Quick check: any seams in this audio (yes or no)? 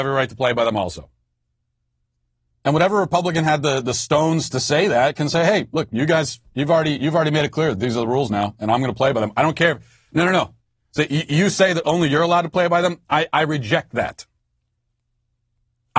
yes